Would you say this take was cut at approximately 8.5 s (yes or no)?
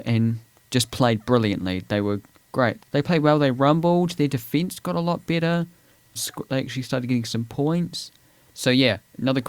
yes